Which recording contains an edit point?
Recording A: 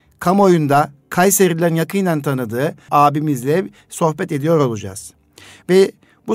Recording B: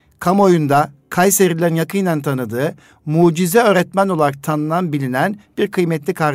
A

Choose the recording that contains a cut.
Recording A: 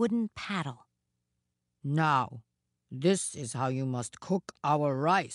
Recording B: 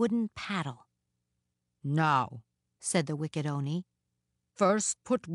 B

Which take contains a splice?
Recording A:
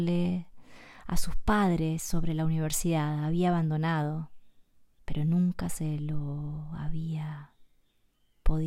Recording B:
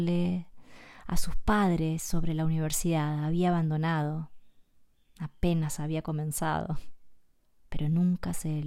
A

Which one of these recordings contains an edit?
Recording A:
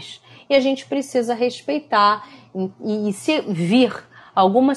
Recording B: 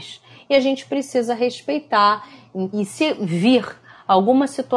B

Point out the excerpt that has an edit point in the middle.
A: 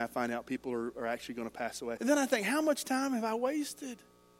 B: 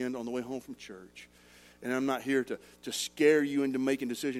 A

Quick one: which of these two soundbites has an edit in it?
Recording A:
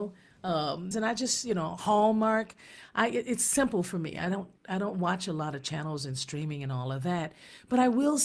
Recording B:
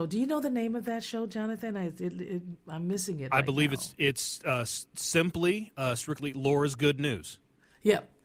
A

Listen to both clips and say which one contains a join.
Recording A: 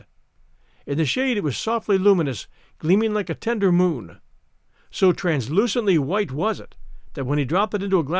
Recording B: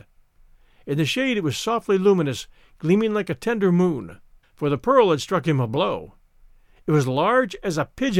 B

